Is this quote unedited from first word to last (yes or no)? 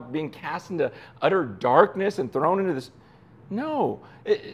yes